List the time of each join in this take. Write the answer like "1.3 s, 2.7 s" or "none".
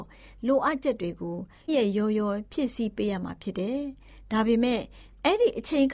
1.7 s